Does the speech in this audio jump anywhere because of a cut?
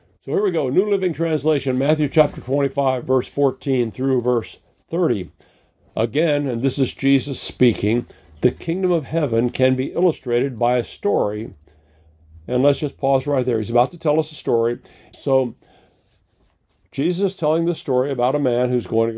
yes; 1 cut; at 15.1 s

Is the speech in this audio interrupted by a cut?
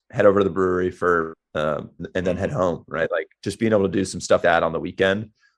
yes; 2 cuts; at 2.0 s, 4.4 s

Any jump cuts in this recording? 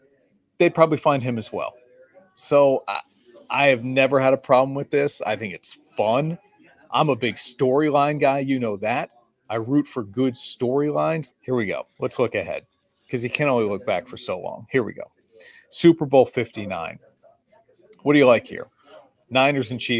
yes; 1 cut; at 11.3 s

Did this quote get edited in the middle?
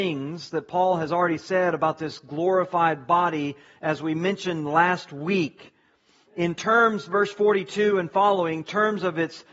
no; 0 cuts

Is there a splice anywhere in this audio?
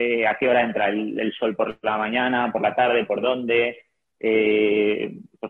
no; 0 cuts

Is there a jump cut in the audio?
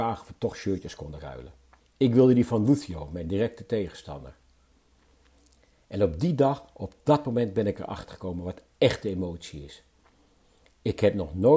no; 0 cuts

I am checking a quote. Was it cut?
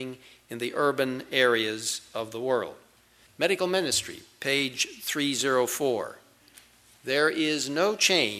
yes; 1 cut; at 3.3 s

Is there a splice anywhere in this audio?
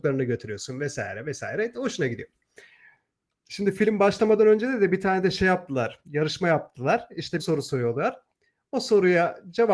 yes; 1 cut; at 7.4 s

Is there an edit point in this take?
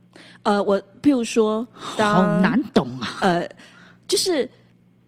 no; 0 cuts

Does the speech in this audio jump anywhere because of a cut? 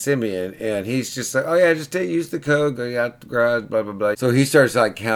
yes; 2 cuts; at 2.8 s, 4.1 s

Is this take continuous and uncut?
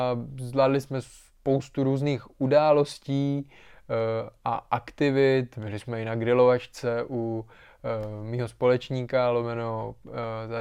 yes; 0 cuts

